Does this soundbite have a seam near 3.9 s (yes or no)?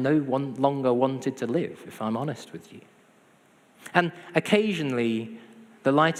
no